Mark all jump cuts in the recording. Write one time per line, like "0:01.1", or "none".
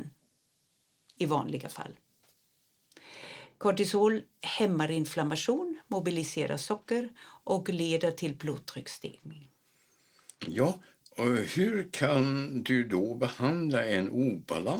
none